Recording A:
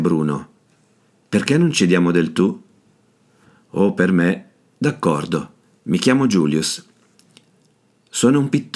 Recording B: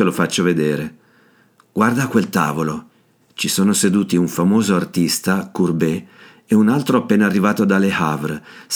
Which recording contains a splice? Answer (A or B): B